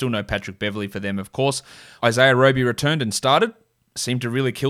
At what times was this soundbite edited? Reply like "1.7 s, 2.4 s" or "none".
2.0 s